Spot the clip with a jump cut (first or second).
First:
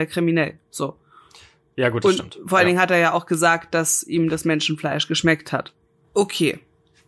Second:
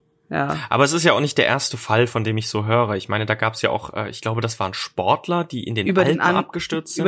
first